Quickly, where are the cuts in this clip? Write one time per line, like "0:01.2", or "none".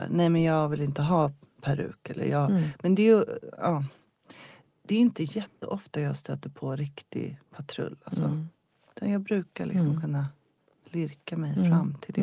none

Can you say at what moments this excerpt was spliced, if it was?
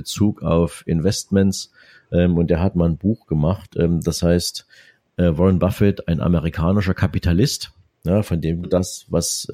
0:08.6

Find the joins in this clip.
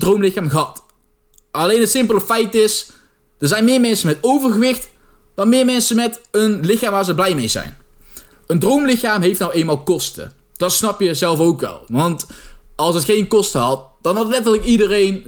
0:08.3

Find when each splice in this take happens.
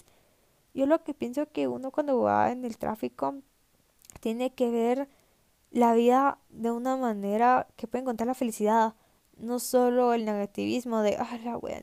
none

